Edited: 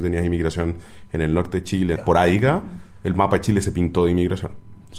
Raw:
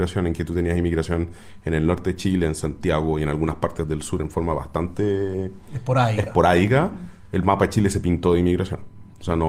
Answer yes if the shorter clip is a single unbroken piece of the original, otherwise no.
no